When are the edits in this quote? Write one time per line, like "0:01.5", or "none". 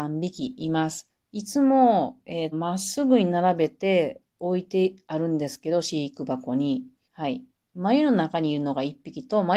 0:01.2
0:02.5
0:07.0